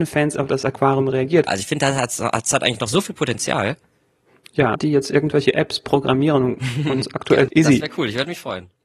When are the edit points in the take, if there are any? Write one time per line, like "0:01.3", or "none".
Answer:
0:01.5
0:04.7
0:07.5